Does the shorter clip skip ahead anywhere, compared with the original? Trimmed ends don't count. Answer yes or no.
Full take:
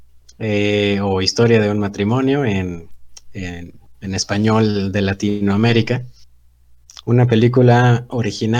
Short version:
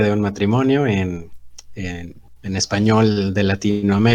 no